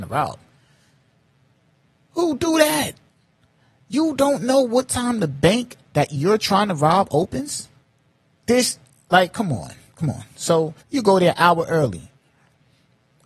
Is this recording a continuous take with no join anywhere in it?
no; 1 cut; at 10.8 s

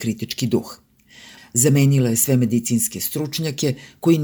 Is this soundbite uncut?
no; 1 cut; at 1.4 s

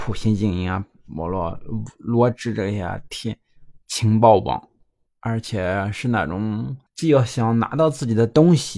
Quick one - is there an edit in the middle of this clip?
yes; 2 cuts; at 5.1 s, 6.9 s

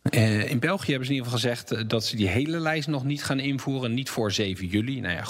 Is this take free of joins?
yes; 0 cuts

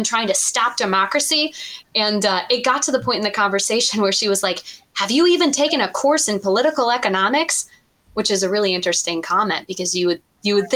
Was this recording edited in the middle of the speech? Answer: no; 0 cuts

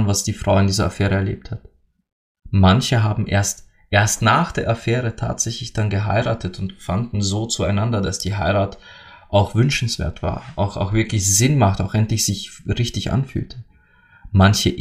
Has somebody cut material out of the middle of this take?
no; 0 cuts

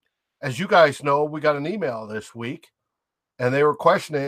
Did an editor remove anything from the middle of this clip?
no; 0 cuts

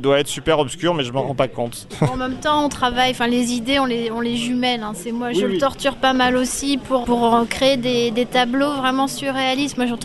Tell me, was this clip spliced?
yes; 1 cut; at 7.0 s

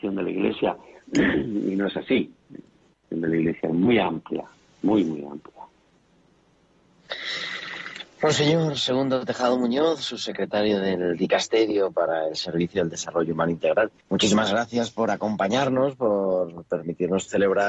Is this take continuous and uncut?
no; 1 cut; at 14.0 s

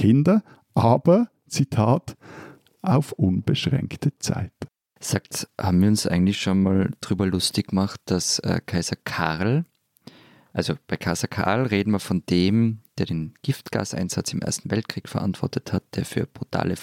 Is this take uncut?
yes; 0 cuts

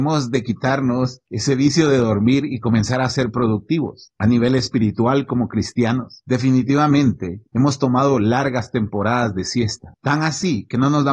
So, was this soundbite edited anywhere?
no; 0 cuts

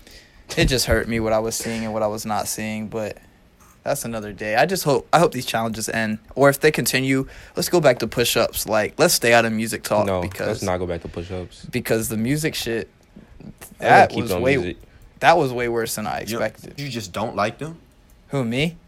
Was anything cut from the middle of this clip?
yes; 1 cut; at 16.8 s

